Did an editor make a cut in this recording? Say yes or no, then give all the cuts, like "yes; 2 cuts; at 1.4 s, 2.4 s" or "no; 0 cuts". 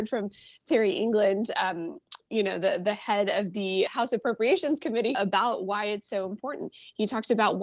yes; 2 cuts; at 3.9 s, 5.1 s